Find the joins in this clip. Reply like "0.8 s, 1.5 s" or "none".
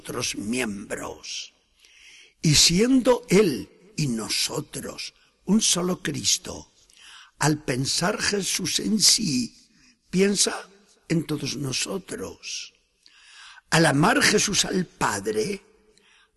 none